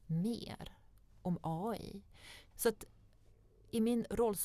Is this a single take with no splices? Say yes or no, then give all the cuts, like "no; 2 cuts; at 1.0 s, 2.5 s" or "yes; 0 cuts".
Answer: no; 1 cut; at 2.5 s